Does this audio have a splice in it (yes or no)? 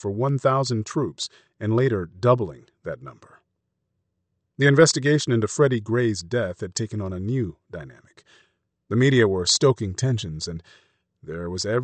yes